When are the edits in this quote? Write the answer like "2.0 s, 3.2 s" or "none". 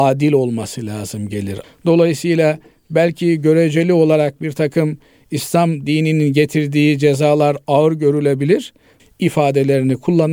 1.6 s, 9.0 s